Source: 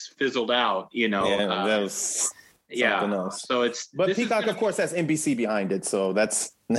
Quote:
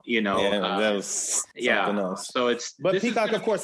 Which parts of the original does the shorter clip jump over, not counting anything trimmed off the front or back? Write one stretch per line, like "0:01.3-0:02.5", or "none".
0:02.4-0:02.7